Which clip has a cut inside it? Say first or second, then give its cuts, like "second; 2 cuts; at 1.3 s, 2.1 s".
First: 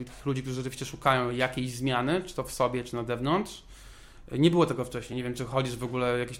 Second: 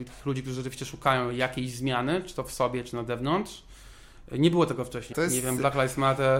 second; 1 cut; at 5.1 s